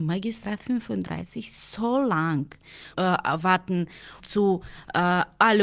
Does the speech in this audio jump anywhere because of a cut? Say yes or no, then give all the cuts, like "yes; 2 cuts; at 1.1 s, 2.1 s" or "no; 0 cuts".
yes; 2 cuts; at 2.9 s, 4.2 s